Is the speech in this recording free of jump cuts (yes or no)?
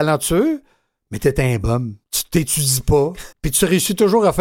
no